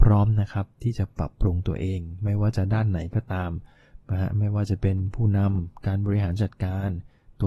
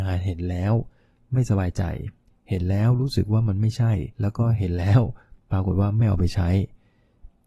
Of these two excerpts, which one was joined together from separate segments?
second; 1 cut; at 4.1 s

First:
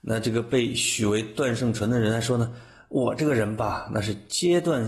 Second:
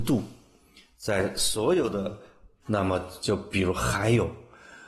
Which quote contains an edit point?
second; 1 cut; at 2.6 s

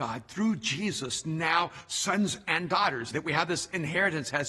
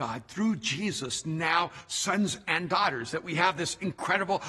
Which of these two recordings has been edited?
first; 1 cut; at 3.1 s

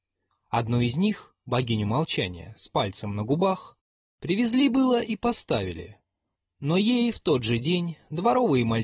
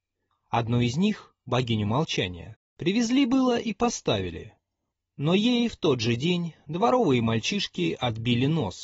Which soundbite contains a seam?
second; 1 cut; at 2.5 s

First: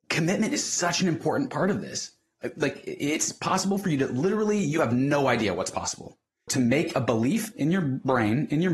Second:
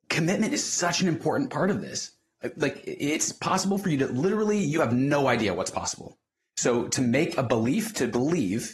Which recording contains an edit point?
first; 2 cuts; at 6.5 s, 7.5 s

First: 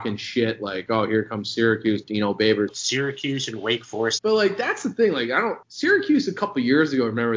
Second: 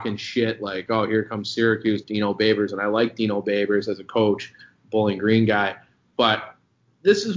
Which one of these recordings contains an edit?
first; 3 cuts; at 2.7 s, 4.2 s, 5.6 s

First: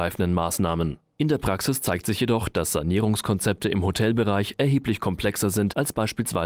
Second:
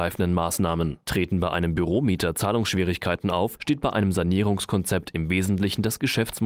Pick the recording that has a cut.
second; 1 cut; at 1.0 s

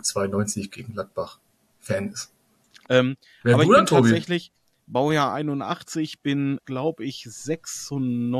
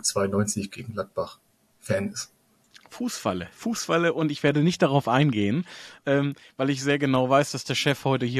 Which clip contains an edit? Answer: first; 2 cuts; at 2.9 s, 6.6 s

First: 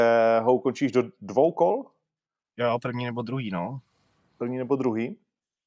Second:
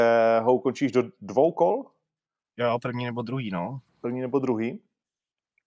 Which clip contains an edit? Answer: second; 1 cut; at 3.9 s

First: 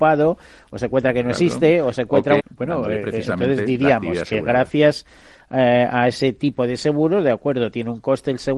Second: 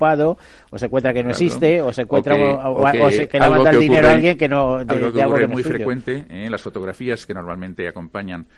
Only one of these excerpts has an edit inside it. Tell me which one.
first; 1 cut; at 2.4 s

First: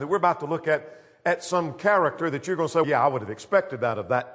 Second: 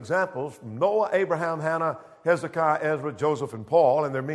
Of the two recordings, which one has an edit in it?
first; 1 cut; at 2.8 s

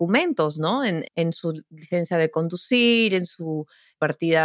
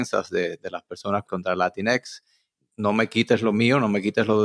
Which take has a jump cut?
first; 1 cut; at 1.0 s

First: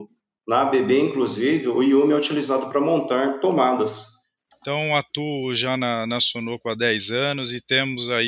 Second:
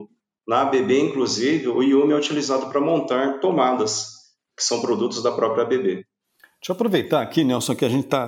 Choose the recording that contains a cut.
first; 1 cut; at 4.5 s

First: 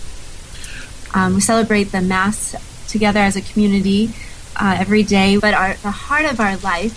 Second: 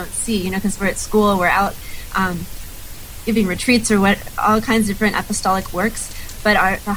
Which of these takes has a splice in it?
first; 2 cuts; at 1.1 s, 5.4 s

